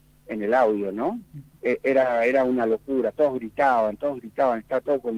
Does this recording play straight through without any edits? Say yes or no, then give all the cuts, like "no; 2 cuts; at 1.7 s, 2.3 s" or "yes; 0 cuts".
no; 1 cut; at 1.5 s